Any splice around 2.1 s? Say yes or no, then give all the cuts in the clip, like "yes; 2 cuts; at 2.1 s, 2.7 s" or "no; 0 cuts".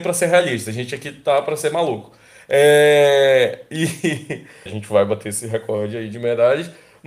no; 1 cut; at 4.7 s